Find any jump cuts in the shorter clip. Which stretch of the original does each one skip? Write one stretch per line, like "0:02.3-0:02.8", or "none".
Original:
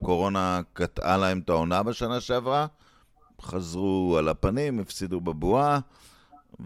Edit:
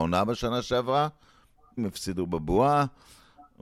0:03.4-0:04.7